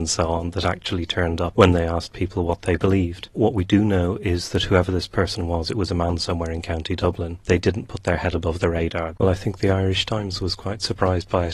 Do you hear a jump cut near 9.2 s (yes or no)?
yes